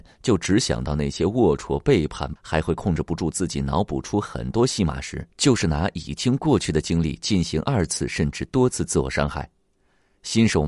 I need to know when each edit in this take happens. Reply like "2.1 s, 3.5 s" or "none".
2.4 s, 5.3 s